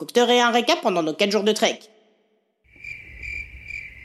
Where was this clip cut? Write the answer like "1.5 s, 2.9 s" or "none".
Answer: none